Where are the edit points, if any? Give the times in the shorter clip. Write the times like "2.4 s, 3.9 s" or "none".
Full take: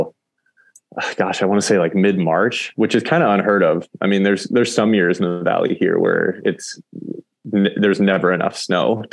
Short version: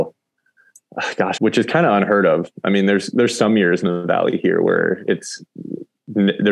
1.4 s